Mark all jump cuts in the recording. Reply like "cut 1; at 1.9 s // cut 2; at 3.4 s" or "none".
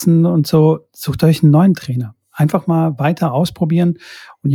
none